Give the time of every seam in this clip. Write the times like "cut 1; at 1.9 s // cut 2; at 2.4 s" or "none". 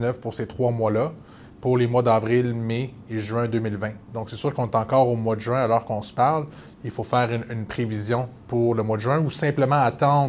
none